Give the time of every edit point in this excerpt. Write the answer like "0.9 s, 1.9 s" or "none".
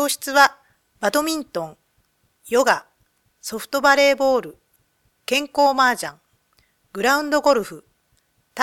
none